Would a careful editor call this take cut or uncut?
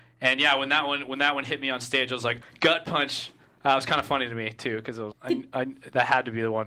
cut